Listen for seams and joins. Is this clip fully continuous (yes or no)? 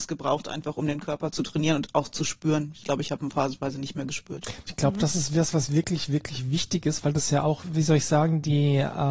no